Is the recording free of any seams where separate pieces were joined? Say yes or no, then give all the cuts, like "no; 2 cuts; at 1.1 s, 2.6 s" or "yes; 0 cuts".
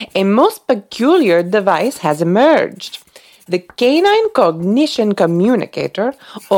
yes; 0 cuts